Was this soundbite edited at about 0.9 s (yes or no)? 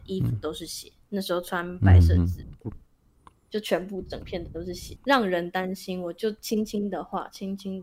no